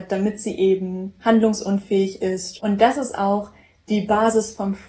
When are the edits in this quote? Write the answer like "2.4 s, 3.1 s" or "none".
2.6 s